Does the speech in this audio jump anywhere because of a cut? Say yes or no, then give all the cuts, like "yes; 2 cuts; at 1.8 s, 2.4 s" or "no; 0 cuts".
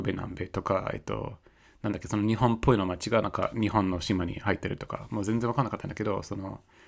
no; 0 cuts